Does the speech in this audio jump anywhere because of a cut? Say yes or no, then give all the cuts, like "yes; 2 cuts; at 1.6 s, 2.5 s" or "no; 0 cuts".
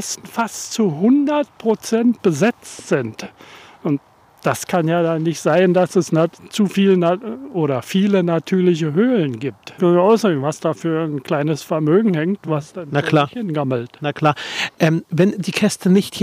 yes; 1 cut; at 9.8 s